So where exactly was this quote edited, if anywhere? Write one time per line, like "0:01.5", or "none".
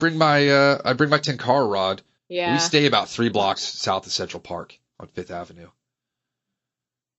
0:02.2